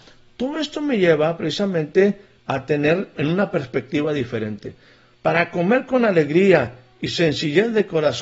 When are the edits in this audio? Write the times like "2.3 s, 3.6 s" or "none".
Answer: 3.1 s, 5.1 s